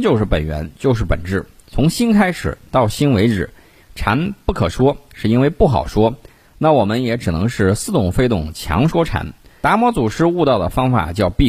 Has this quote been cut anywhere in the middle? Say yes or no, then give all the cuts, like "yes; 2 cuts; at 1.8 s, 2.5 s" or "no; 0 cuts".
yes; 3 cuts; at 3.8 s, 6.4 s, 9.6 s